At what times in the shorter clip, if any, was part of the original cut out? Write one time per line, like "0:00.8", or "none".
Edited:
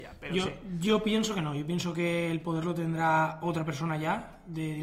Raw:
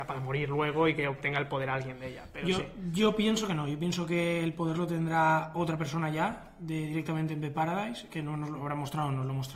none

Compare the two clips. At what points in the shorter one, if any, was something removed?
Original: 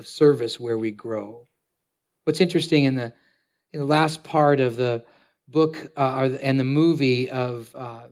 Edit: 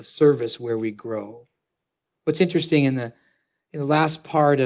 none

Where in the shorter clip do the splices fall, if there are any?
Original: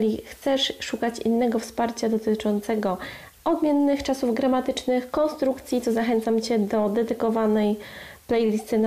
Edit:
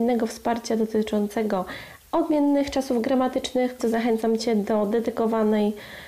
0:03.8

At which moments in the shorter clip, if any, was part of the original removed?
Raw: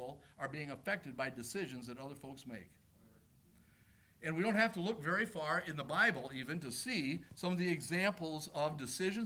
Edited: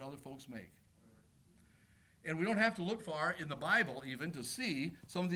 0:03.0

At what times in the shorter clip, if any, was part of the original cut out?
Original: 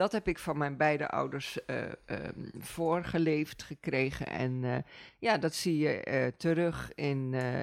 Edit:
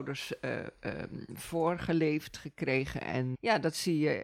0:03.3

